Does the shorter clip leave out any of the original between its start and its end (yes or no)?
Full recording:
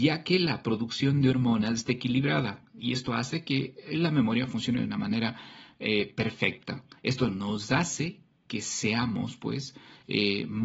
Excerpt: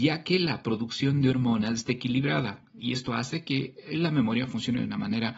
no